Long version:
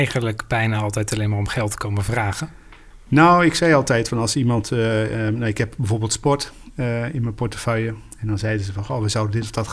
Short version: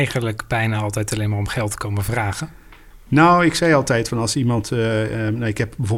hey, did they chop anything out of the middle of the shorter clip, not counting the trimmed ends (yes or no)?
no